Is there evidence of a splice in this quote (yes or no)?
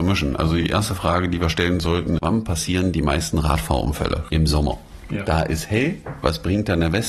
yes